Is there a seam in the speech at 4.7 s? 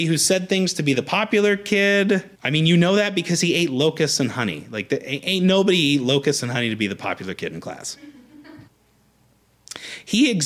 no; 2 cuts; at 2.3 s, 8.7 s

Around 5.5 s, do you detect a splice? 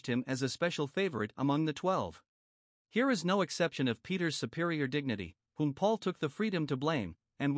no; 1 cut; at 2.8 s

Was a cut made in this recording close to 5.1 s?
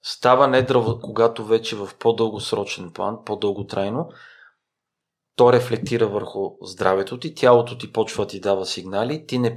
no; 1 cut; at 1.0 s

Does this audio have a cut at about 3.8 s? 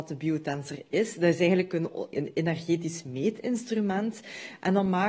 no; 1 cut; at 2.1 s

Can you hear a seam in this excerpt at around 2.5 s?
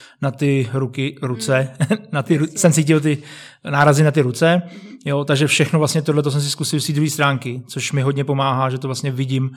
no; 0 cuts

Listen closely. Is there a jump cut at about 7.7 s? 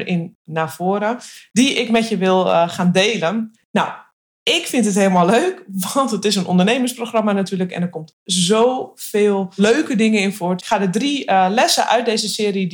no; 2 cuts; at 3.5 s, 10.6 s

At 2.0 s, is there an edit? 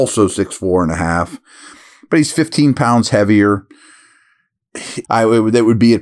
no; 1 cut; at 5.0 s

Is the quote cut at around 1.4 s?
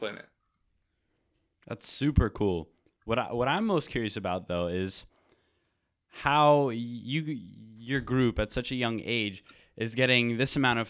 no; 0 cuts

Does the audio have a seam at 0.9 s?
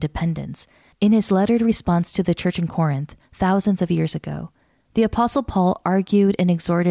yes; 1 cut; at 0.9 s

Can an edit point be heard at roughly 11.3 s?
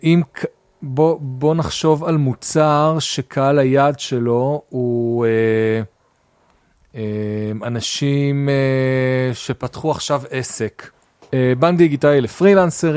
yes; 1 cut; at 11.3 s

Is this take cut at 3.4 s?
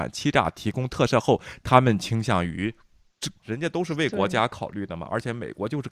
yes; 1 cut; at 3.4 s

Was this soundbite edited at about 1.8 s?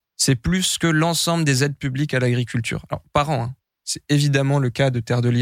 no; 1 cut; at 3.8 s

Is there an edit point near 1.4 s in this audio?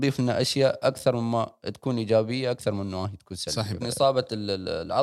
no; 1 cut; at 3.8 s

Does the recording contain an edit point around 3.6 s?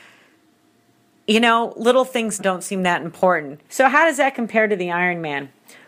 yes; 2 cuts; at 2.4 s, 3.6 s

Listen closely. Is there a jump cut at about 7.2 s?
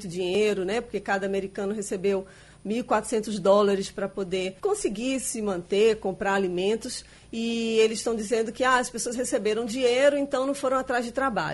no; 1 cut; at 4.6 s

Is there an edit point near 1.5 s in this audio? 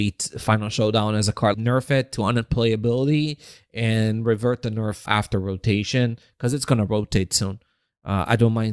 yes; 2 cuts; at 1.5 s, 5.1 s

